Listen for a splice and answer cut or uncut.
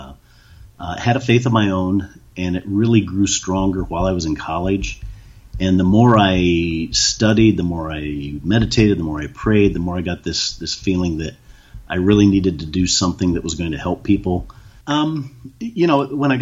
cut